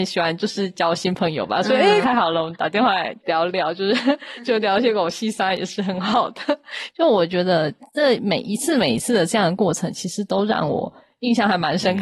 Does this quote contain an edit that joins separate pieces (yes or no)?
yes